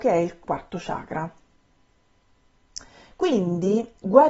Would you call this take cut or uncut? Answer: uncut